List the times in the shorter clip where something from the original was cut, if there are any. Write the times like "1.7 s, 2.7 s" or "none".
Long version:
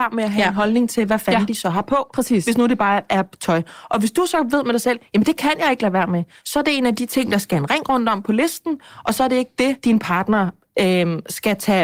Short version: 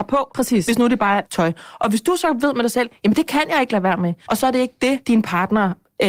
1.3 s, 4.3 s